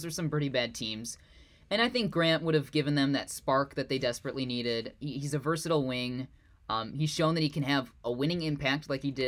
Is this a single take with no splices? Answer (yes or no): yes